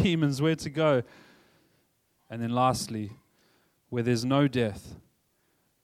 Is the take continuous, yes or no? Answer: no